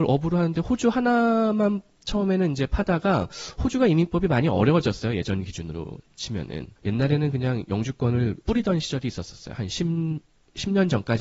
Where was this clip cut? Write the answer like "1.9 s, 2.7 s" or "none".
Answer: 6.8 s, 8.4 s